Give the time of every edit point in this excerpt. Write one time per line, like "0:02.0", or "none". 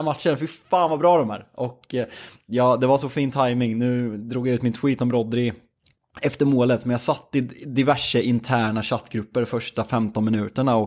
none